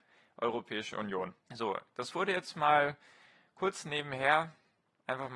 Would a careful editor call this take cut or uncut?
cut